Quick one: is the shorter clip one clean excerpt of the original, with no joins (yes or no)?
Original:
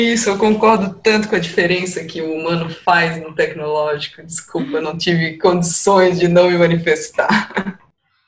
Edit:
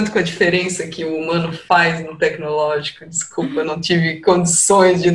yes